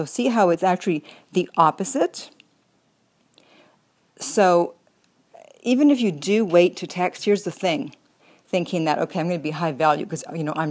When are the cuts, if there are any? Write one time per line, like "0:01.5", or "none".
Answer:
none